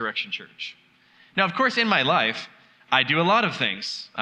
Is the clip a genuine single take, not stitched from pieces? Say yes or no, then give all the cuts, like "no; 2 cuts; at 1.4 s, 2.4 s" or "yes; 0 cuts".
yes; 0 cuts